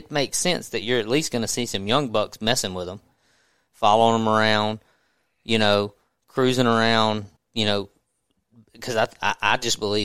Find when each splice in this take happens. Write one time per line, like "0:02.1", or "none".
0:07.4